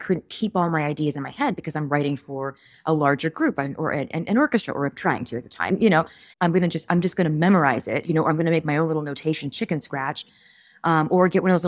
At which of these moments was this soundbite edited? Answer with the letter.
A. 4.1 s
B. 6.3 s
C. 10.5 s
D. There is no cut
B